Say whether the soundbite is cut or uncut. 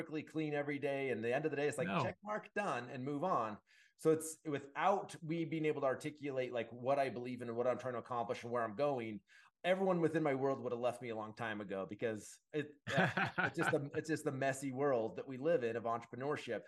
uncut